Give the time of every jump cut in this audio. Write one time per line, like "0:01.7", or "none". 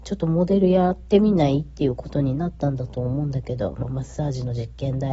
0:03.8